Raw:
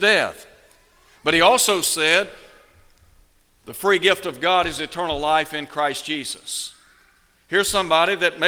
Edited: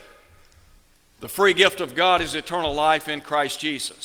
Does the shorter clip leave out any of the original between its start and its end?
no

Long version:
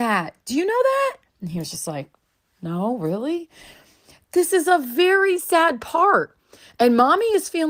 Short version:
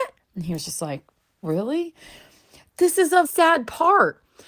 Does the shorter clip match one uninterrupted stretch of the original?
no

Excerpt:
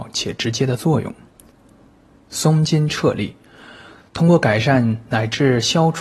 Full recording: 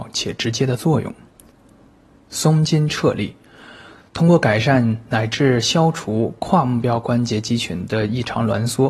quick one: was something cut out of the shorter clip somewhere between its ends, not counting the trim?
no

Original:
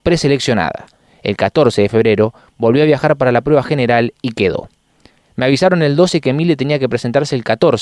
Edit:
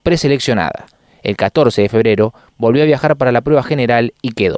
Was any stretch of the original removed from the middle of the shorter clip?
no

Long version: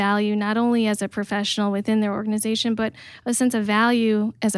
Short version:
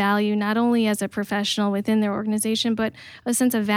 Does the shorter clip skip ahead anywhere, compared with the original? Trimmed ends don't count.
no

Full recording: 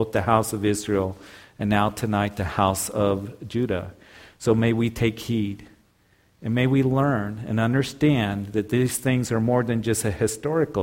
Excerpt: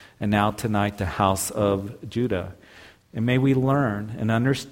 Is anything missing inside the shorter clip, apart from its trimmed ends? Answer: yes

